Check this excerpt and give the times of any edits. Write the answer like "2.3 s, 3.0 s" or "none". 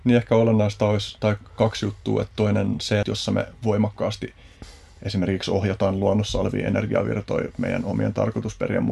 3.0 s